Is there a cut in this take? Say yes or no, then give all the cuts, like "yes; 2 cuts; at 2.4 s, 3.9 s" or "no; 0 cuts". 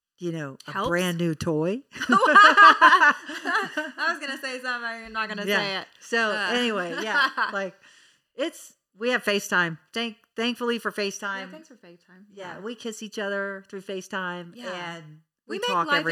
no; 0 cuts